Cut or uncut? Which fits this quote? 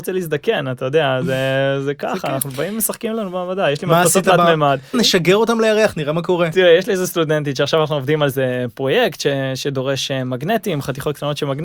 cut